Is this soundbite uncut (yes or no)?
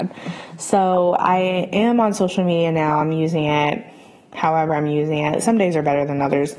yes